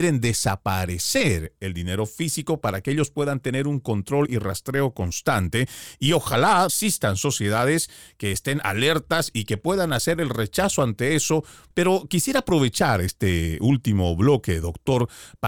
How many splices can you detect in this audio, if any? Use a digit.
1